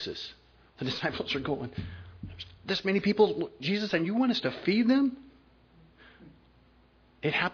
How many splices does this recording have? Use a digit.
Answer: 0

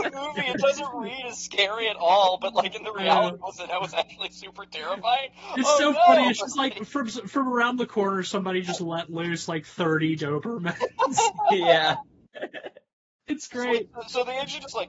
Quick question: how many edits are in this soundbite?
0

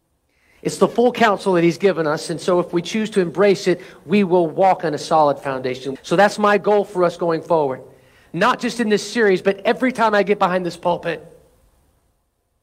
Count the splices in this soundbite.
1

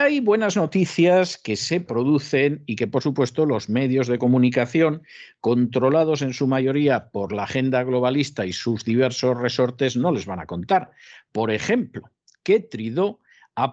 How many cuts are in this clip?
0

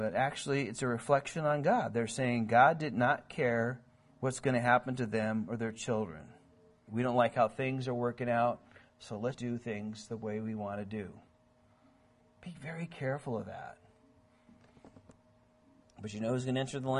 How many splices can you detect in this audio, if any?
3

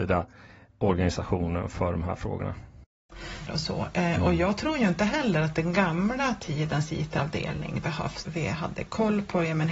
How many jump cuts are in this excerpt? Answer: 2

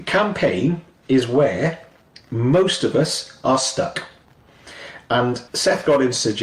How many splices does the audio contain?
1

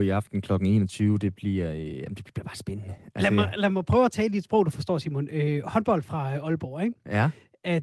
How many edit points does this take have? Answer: 0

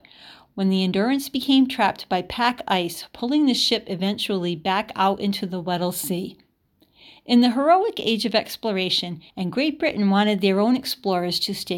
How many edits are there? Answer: 1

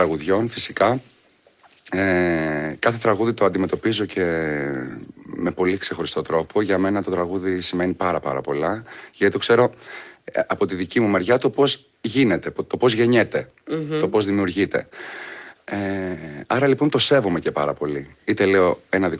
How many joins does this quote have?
0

